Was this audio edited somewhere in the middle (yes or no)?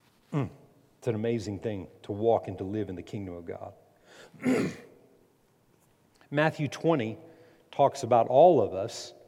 no